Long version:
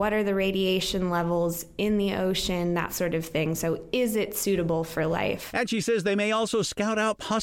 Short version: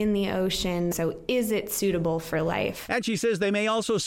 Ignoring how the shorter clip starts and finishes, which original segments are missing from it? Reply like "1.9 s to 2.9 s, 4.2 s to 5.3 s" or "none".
2.8 s to 3.6 s